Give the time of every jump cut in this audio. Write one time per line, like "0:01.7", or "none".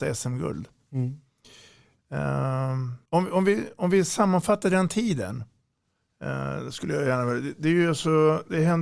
0:03.1